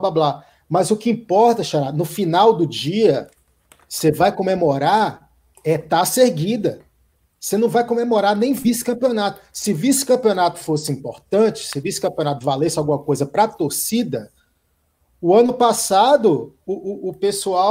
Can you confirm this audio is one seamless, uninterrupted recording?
yes; 0 cuts

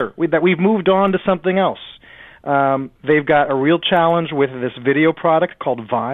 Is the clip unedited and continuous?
yes; 0 cuts

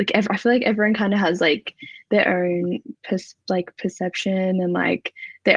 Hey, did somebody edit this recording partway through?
no; 0 cuts

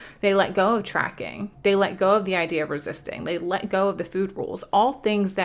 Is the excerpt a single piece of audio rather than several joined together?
yes; 0 cuts

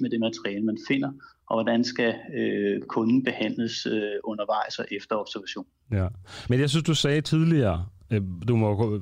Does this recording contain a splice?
no; 0 cuts

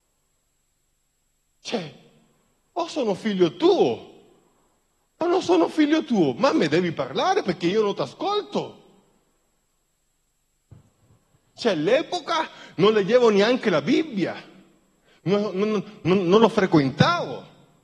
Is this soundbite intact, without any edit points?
yes; 0 cuts

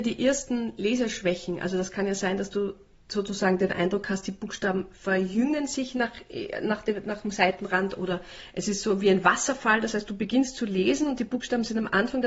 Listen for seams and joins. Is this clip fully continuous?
yes; 0 cuts

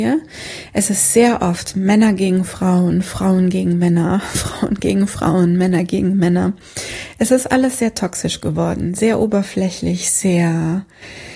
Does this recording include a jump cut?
no; 0 cuts

